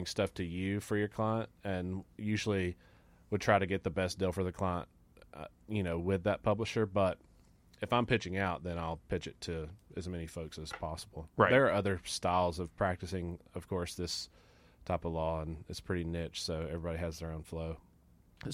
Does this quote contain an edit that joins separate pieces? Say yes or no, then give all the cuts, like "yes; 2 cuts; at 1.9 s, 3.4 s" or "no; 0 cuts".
no; 0 cuts